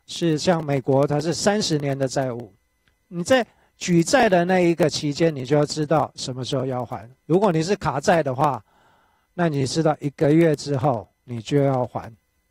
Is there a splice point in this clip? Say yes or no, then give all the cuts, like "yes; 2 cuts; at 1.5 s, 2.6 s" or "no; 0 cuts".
no; 0 cuts